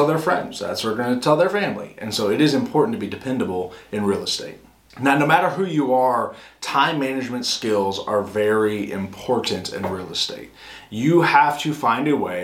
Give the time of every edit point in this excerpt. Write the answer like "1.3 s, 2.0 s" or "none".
none